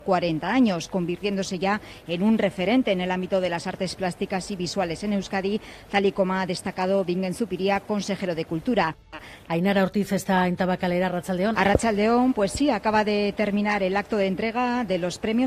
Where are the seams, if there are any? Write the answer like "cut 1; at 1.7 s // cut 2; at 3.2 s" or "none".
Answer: cut 1; at 9.5 s // cut 2; at 11.5 s